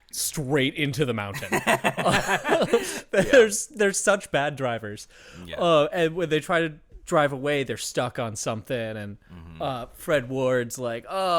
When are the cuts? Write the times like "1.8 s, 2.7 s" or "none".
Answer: none